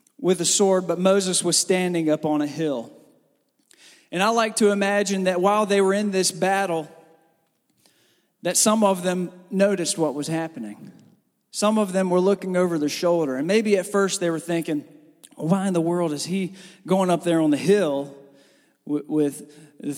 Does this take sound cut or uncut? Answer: uncut